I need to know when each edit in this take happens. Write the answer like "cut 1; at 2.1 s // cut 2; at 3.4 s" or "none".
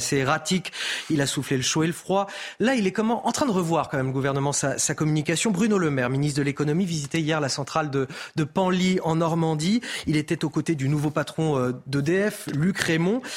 none